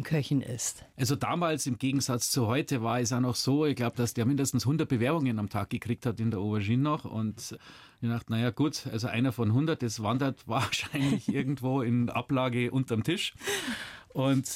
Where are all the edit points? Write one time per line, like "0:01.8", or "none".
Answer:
none